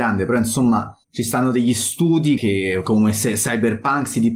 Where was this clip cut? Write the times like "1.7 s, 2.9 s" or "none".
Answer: 1.0 s, 2.4 s